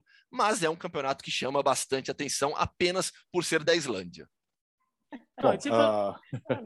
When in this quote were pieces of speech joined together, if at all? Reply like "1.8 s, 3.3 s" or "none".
none